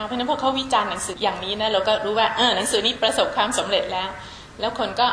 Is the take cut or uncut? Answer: cut